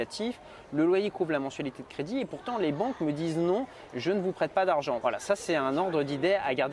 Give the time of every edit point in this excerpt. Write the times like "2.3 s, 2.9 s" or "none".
5.0 s